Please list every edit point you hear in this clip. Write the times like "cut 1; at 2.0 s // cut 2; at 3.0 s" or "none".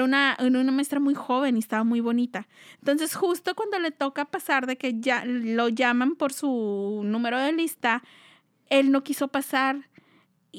none